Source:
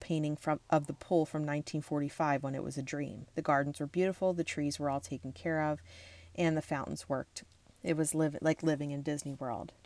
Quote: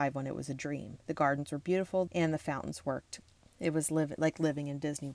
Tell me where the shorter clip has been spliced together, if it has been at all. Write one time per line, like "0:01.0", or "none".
0:02.1